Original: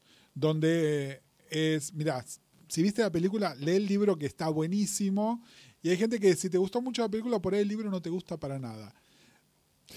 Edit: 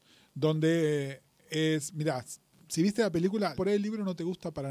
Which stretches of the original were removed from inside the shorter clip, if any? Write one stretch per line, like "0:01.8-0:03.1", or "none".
0:03.6-0:07.4